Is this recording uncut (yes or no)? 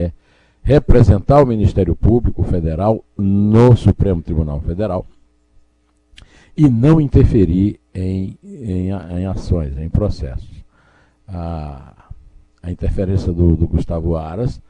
yes